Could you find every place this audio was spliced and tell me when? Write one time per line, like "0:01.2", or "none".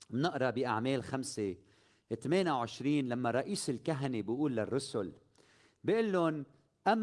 none